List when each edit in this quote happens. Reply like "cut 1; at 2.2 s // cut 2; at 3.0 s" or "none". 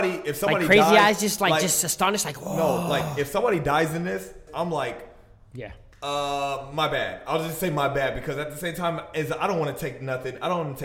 cut 1; at 4.5 s